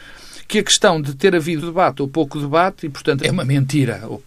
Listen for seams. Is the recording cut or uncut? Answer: cut